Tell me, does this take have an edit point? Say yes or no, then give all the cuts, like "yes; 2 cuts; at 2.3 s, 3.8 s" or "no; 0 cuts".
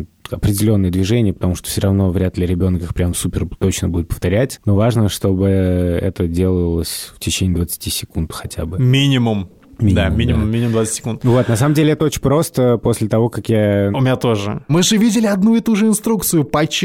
yes; 1 cut; at 13.9 s